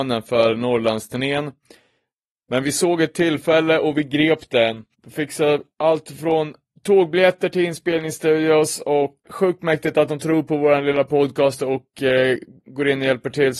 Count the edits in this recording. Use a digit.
2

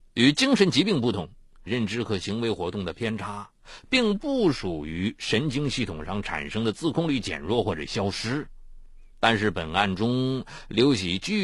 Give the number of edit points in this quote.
2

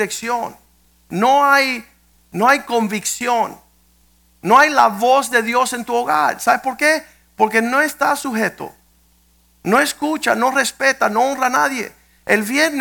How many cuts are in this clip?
0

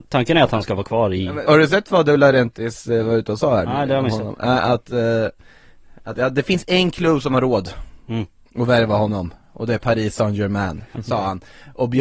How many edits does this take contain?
1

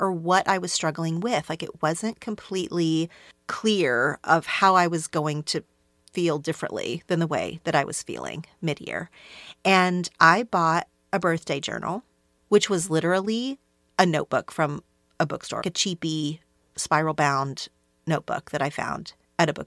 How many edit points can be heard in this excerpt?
1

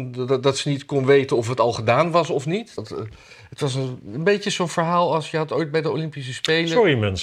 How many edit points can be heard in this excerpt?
1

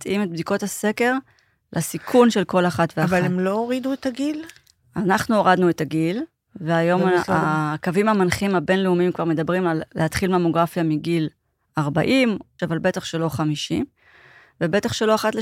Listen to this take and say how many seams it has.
1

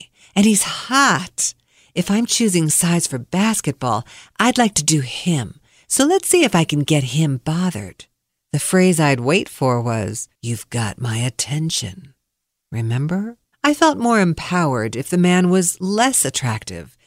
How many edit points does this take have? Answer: 2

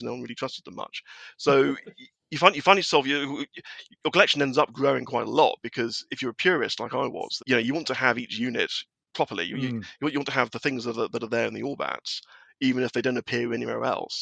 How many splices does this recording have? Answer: 1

